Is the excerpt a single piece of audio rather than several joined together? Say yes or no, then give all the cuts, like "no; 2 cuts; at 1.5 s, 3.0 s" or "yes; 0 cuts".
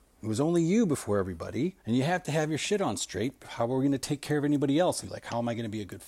no; 2 cuts; at 1.8 s, 5.0 s